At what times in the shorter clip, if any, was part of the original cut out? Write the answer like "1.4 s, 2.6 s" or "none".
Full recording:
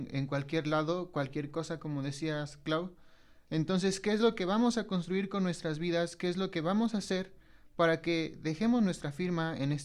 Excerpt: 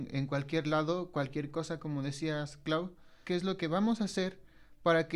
3.2 s

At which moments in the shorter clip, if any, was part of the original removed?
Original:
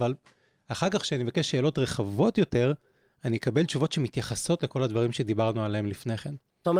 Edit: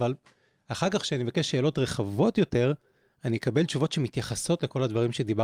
none

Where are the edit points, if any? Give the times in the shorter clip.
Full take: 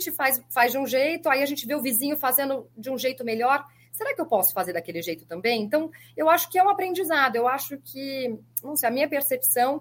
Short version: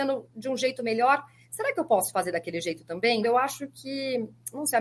3.2 s

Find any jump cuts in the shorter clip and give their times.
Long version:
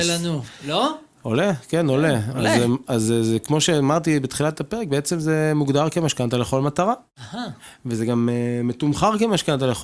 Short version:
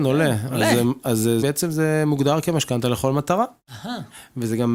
1.4 s

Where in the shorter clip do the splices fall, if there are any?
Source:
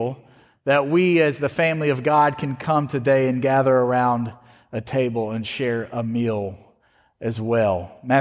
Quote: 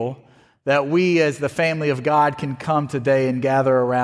none

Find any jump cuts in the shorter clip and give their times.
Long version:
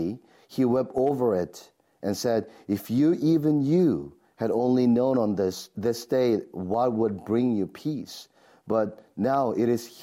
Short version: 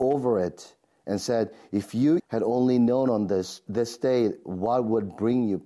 2.2 s

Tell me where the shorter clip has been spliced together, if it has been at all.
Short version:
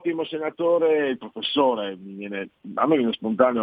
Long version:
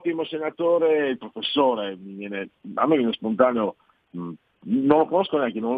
none

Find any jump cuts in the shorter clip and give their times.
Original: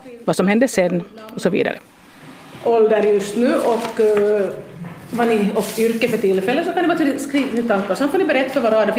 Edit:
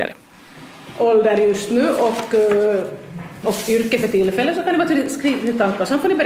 3.4 s

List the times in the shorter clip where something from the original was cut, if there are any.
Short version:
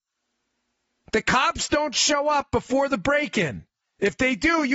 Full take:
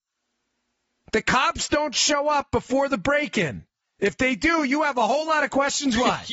none

